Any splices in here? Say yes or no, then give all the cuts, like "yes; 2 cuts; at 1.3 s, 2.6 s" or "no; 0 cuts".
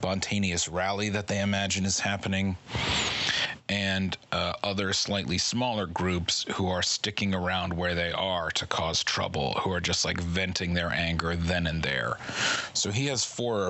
no; 0 cuts